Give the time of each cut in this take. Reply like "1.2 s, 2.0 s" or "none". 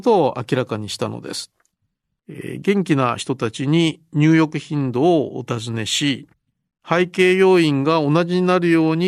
2.2 s